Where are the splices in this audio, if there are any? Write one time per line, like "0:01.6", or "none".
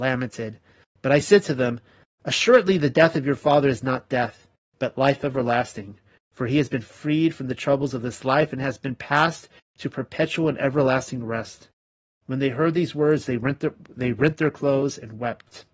none